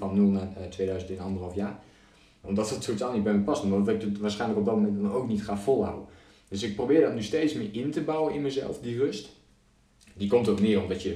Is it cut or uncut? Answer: cut